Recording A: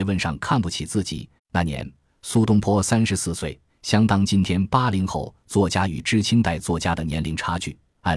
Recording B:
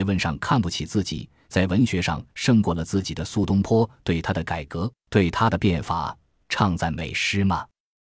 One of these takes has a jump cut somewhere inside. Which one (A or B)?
A